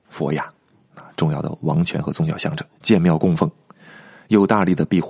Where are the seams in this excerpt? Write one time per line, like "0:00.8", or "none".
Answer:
0:02.8